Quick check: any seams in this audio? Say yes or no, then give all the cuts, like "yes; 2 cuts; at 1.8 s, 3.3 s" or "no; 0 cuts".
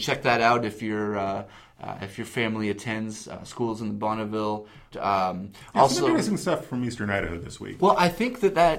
yes; 2 cuts; at 4.9 s, 7.8 s